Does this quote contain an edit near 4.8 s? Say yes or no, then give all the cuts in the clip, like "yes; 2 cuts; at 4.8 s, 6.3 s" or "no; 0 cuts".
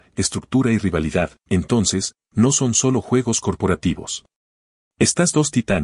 yes; 1 cut; at 4.8 s